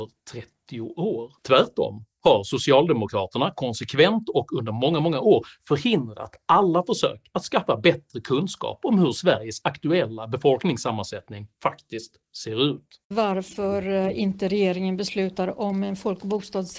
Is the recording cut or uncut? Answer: cut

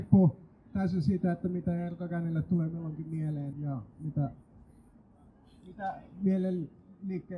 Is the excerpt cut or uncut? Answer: cut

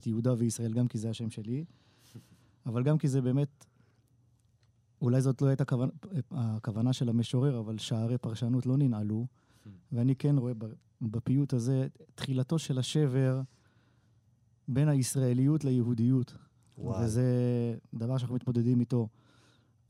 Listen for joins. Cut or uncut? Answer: uncut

